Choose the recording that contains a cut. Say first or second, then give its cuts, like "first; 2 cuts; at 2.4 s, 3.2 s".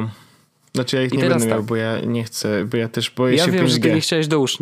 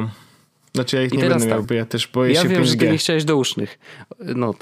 second; 1 cut; at 1.6 s